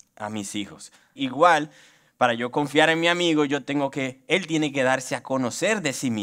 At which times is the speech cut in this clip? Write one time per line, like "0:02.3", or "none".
0:01.2